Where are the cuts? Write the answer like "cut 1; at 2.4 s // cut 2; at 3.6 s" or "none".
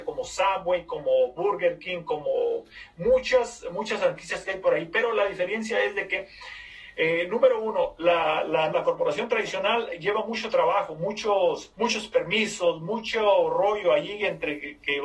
cut 1; at 8.7 s // cut 2; at 11.7 s